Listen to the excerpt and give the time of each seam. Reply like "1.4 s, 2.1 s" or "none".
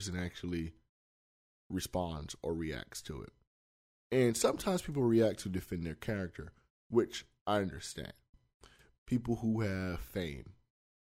9.0 s